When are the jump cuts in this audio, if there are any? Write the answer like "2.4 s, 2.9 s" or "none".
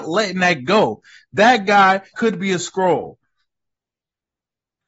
2.1 s